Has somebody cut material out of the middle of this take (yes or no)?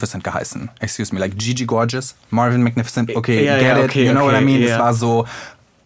no